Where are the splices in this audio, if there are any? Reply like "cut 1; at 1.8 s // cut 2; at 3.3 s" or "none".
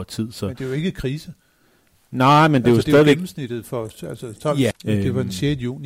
cut 1; at 4.7 s